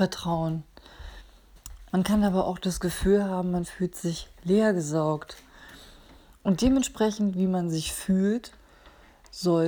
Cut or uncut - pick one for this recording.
cut